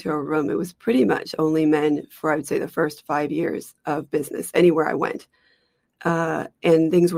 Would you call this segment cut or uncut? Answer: cut